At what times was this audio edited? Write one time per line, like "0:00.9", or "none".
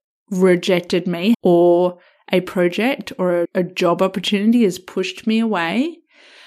0:01.3
0:03.4